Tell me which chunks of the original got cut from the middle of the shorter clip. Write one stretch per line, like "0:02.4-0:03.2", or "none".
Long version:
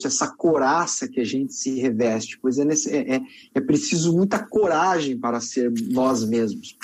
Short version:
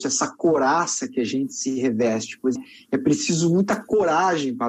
0:02.6-0:03.2

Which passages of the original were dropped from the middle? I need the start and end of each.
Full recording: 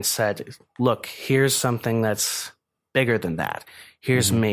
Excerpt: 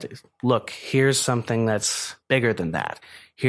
0:02.6-0:02.9

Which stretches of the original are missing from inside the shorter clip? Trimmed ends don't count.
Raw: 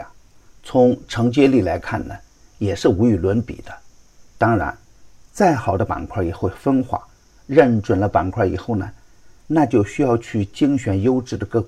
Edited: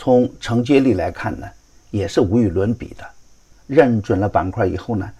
0:04.2-0:07.3

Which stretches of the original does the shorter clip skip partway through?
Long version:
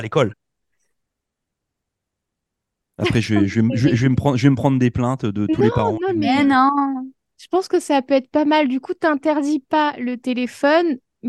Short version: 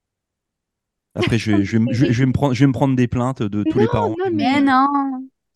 none

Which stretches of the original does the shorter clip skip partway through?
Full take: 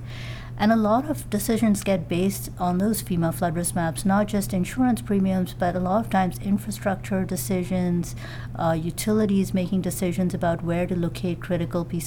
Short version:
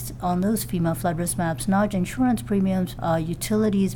0:04.3-0:04.5
0:05.5-0:08.5

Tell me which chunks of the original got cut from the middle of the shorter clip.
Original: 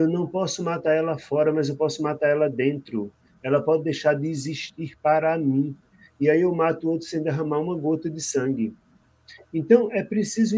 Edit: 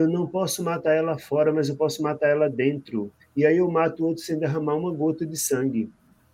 0:03.2-0:06.0

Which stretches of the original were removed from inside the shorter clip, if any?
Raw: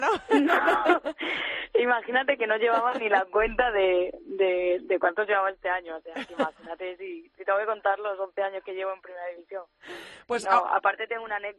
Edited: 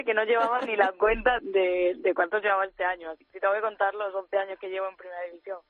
0:03.7-0:04.2
0:06.1-0:07.3

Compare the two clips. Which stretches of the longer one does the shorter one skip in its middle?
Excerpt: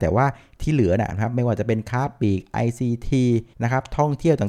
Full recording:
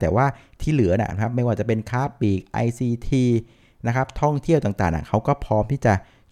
0:03.5-0:03.8

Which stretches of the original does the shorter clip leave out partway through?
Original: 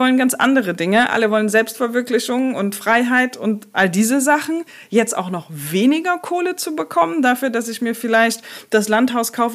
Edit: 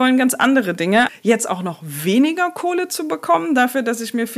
0:01.1-0:04.8

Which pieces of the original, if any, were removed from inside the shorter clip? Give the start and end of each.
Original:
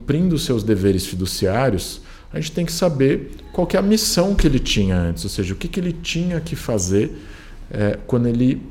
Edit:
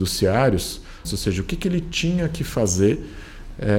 0:02.3-0:05.2

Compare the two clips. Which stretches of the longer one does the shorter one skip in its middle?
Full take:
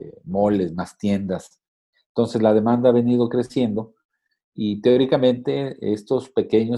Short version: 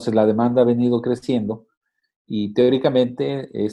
none

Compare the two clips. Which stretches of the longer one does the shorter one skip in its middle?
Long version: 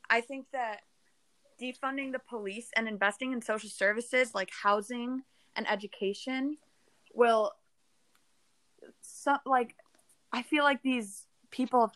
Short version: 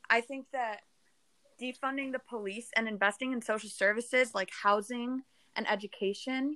none

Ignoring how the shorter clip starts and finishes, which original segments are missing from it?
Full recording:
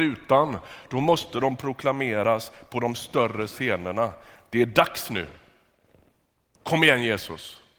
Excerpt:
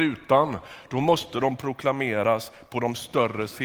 none

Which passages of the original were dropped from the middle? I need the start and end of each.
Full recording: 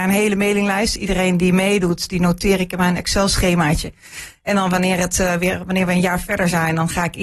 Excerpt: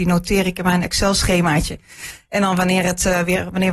none

